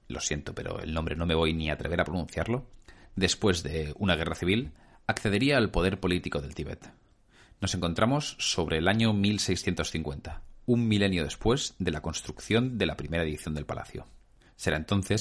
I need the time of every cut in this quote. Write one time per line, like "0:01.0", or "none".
none